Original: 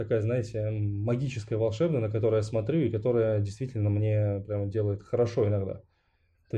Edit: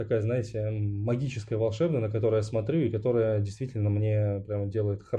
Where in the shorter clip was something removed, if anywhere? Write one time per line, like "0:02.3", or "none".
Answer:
none